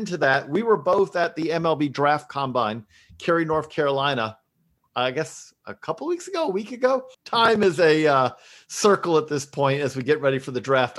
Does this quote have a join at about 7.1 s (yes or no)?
yes